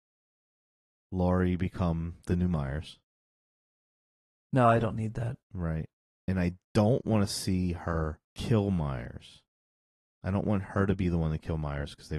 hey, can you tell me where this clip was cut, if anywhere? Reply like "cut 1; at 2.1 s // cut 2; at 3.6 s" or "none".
cut 1; at 5.4 s // cut 2; at 8.2 s